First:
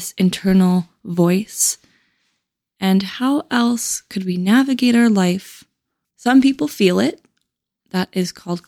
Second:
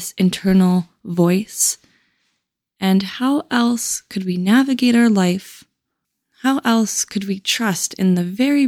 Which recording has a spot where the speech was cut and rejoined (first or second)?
first